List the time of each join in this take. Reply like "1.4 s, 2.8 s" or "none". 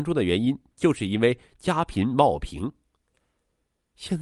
none

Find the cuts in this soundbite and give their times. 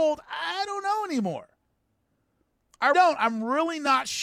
2.9 s

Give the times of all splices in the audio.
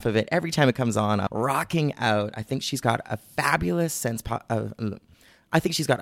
1.3 s

